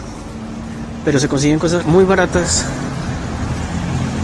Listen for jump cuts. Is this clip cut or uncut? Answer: cut